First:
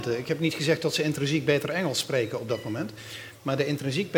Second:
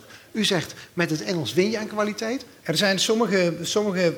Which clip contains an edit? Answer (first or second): second